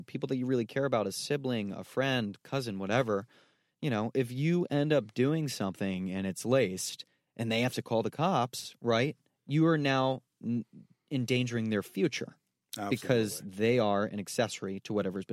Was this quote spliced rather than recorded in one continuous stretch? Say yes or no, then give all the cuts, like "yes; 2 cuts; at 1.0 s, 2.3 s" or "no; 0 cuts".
no; 0 cuts